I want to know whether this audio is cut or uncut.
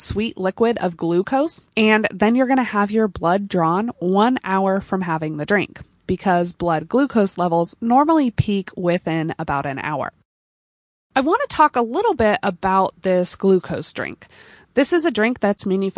cut